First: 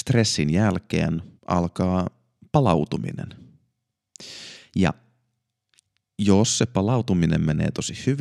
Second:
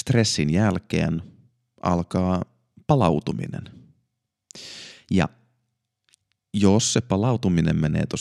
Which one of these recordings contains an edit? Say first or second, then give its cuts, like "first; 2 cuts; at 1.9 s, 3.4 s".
first; 1 cut; at 1.4 s